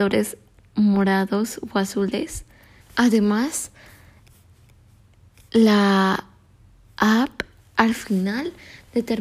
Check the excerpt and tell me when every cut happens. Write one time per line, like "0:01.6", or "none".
0:02.8